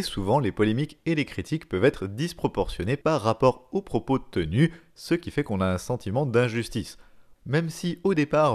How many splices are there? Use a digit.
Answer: 1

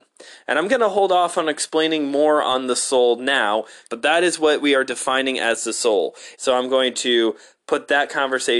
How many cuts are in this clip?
2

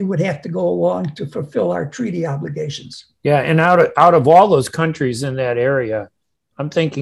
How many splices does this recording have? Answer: 0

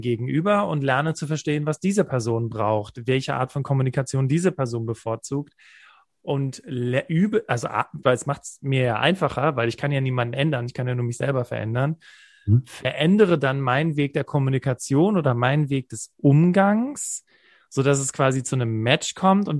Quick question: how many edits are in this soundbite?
1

